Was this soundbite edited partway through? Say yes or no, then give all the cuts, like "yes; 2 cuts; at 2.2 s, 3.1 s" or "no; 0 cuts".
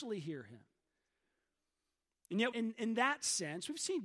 yes; 1 cut; at 2.5 s